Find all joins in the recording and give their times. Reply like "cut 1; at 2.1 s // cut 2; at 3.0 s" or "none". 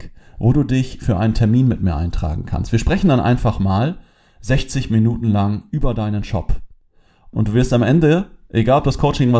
cut 1; at 7.3 s